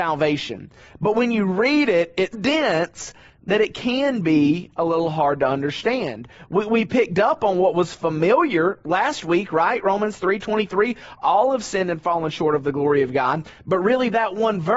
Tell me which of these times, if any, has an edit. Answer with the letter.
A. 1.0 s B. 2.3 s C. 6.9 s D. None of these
B